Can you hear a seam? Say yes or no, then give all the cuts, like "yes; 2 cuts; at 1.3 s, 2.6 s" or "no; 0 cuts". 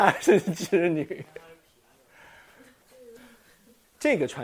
yes; 1 cut; at 3.2 s